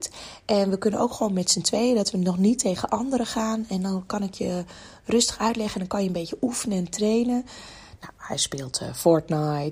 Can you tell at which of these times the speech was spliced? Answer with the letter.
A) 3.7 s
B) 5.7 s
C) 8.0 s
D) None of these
C